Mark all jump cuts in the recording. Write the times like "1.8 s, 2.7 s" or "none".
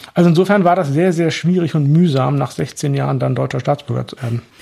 none